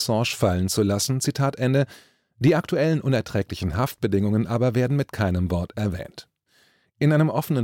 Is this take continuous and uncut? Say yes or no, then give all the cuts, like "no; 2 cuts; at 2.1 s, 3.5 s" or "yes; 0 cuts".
yes; 0 cuts